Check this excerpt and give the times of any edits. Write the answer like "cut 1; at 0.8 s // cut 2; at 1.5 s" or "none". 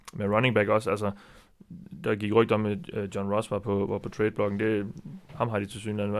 none